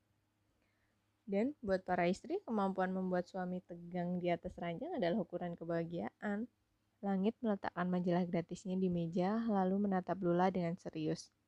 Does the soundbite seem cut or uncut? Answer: cut